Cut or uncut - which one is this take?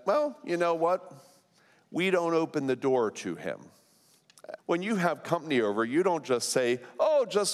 cut